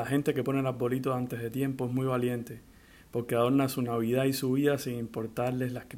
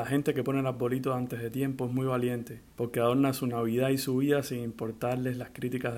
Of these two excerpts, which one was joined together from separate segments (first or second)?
second